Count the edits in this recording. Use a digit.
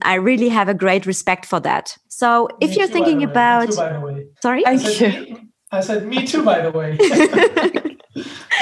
2